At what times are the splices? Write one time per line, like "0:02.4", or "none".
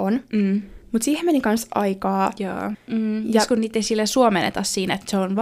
0:02.7